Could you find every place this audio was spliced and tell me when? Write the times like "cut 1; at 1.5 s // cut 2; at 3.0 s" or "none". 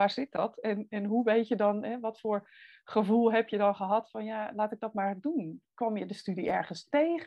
none